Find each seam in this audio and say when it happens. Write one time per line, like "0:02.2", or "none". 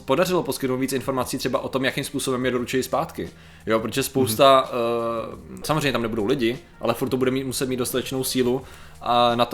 0:05.6